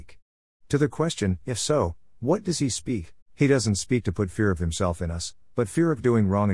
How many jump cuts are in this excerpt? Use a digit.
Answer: 1